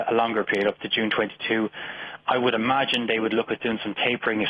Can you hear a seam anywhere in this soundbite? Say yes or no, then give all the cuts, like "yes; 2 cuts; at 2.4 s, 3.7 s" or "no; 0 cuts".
no; 0 cuts